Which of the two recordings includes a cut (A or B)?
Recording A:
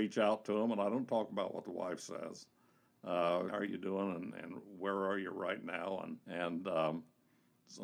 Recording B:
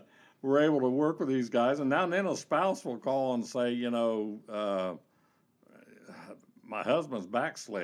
A